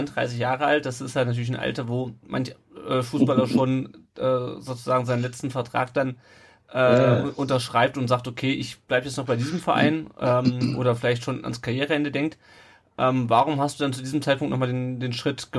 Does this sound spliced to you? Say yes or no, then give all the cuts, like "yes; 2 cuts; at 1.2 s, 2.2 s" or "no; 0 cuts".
no; 0 cuts